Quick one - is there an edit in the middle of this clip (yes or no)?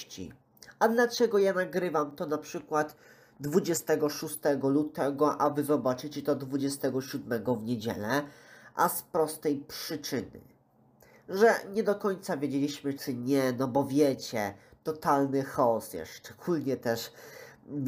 yes